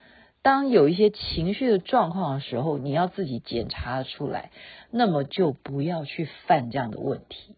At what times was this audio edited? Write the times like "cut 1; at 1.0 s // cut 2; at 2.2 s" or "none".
none